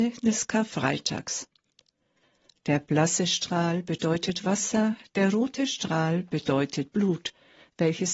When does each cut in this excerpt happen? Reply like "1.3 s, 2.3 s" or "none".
5.1 s